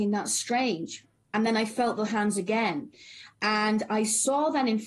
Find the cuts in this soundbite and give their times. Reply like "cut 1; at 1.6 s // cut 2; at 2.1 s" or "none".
none